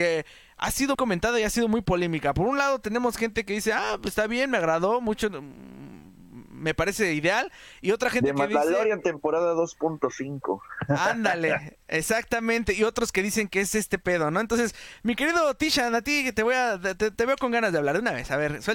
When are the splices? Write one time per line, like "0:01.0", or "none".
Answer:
0:00.9